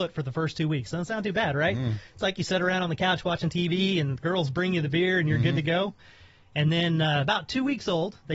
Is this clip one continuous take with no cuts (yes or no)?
yes